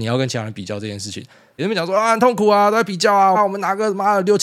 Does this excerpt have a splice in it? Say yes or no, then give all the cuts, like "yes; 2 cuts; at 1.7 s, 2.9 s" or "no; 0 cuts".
yes; 2 cuts; at 1.6 s, 3.3 s